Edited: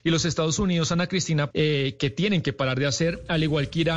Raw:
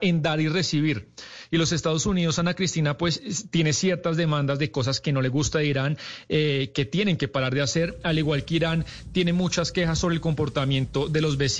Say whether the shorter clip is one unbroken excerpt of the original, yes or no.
no